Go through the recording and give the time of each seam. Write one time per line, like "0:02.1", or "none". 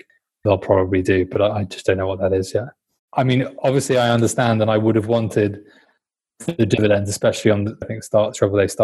0:07.8